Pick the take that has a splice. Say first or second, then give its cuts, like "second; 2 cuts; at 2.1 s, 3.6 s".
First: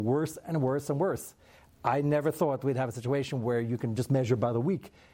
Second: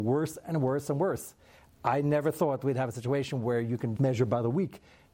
second; 1 cut; at 4.0 s